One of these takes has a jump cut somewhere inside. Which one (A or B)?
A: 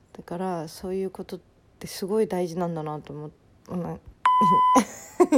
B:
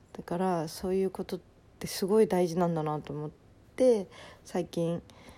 A